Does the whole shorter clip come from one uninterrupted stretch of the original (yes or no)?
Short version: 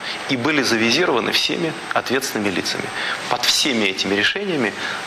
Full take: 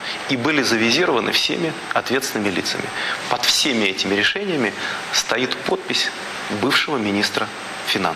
yes